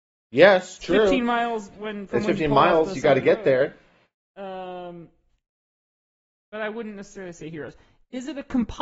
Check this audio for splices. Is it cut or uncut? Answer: uncut